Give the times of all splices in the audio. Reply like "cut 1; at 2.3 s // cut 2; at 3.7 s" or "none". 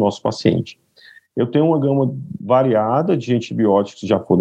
none